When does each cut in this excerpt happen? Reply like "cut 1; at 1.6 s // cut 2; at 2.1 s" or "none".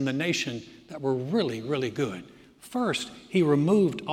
none